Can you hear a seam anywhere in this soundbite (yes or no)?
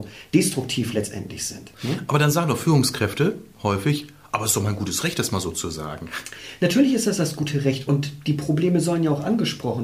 no